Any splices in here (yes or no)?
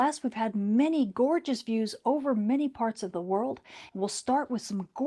yes